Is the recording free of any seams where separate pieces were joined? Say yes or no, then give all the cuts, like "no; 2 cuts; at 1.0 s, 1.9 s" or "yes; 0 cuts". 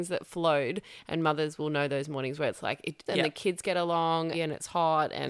no; 2 cuts; at 3.1 s, 4.3 s